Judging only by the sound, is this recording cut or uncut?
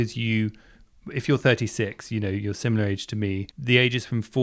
cut